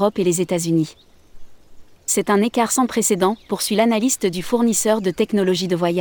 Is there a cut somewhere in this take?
no; 0 cuts

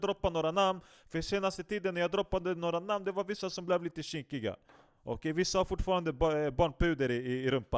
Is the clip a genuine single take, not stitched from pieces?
yes; 0 cuts

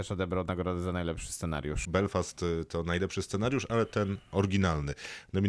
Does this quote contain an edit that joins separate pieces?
yes; 1 cut; at 1.8 s

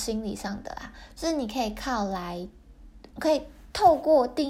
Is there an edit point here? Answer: yes; 1 cut; at 3.1 s

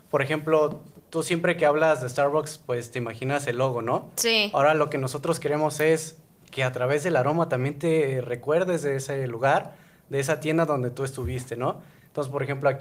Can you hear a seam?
no; 0 cuts

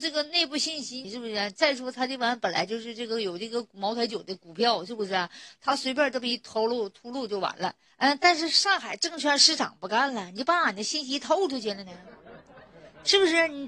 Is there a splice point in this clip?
yes; 2 cuts; at 1.0 s, 7.9 s

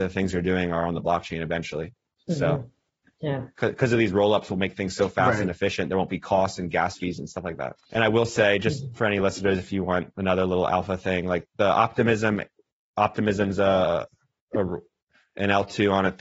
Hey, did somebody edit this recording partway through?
no; 0 cuts

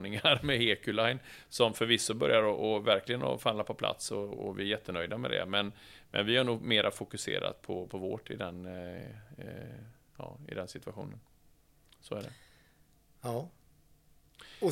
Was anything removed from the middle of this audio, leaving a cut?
no; 0 cuts

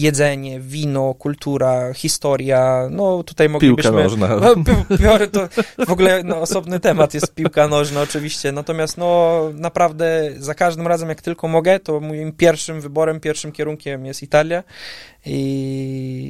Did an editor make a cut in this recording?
no; 0 cuts

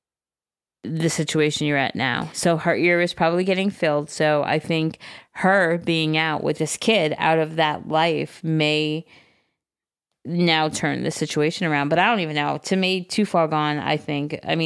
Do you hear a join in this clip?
no; 0 cuts

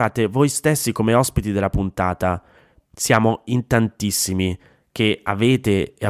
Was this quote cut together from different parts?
yes; 1 cut; at 2.8 s

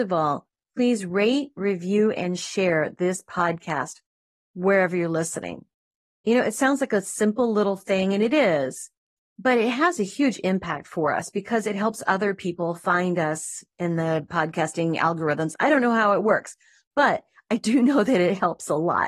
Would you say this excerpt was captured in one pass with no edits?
yes; 0 cuts

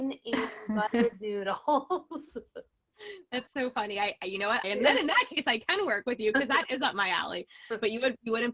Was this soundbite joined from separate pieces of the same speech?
yes; 1 cut; at 4.6 s

